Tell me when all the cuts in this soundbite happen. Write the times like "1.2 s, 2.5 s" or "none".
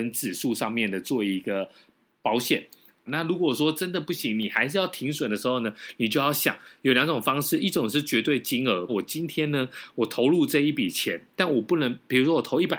3.1 s, 8.9 s